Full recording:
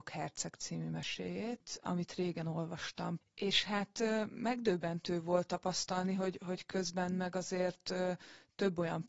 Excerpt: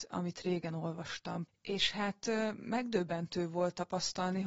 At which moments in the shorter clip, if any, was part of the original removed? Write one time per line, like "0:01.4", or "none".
none